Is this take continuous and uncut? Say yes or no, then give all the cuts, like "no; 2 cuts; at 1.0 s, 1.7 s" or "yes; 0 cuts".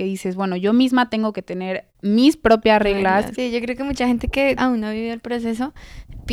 no; 2 cuts; at 3.4 s, 4.6 s